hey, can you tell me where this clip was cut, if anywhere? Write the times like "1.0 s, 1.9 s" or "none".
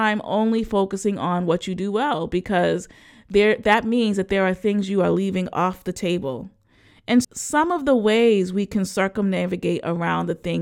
7.2 s

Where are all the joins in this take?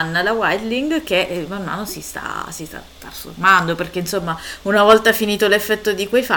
none

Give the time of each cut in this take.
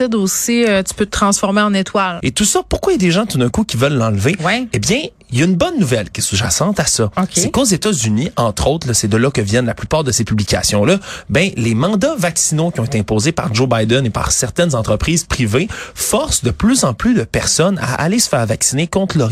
2.2 s

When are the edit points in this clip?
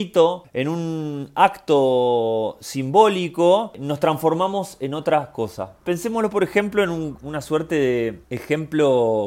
8.2 s

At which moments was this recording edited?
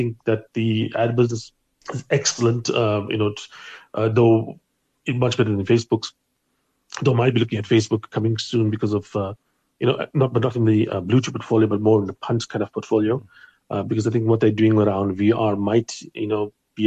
none

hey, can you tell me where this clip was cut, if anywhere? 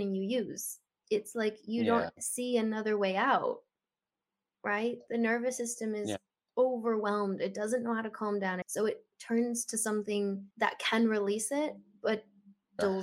8.6 s, 10.5 s

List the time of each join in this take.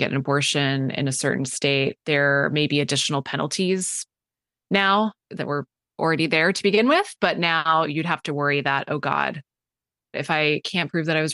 none

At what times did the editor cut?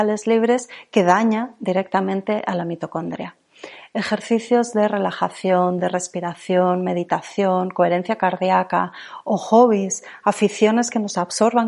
none

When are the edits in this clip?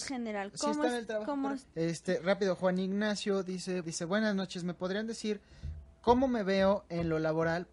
1.6 s, 3.8 s

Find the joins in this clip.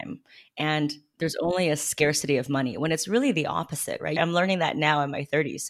4.2 s

